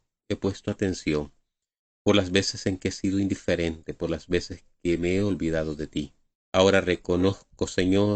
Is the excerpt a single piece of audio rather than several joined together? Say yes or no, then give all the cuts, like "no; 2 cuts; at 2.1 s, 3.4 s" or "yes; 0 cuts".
no; 1 cut; at 6.3 s